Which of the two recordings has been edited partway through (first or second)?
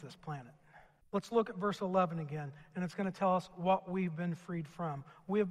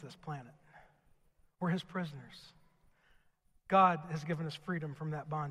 first